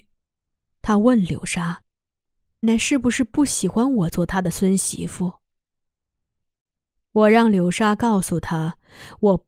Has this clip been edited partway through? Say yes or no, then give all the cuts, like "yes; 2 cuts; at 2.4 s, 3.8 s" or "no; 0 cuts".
yes; 1 cut; at 2.6 s